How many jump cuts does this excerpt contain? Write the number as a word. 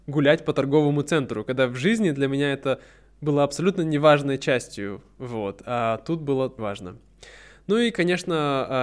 one